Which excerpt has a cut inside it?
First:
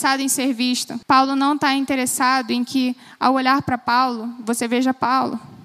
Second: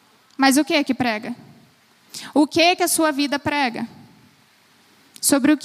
first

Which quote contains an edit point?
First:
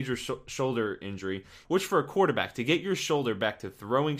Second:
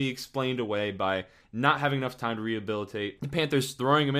first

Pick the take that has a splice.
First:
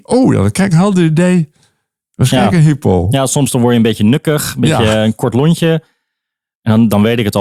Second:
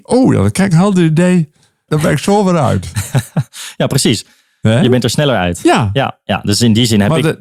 second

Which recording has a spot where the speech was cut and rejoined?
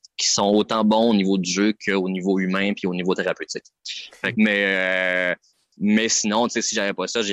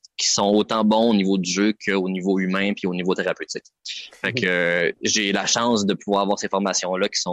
first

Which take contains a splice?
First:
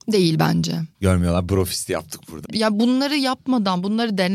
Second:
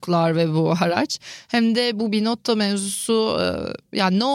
first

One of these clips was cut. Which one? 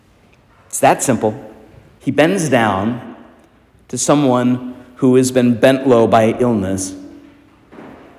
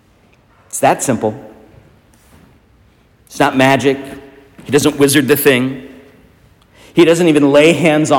first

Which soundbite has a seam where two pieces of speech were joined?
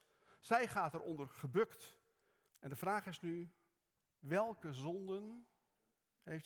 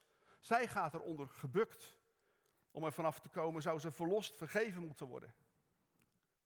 first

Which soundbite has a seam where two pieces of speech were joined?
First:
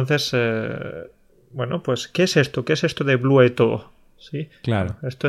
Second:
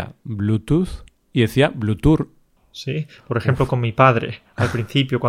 second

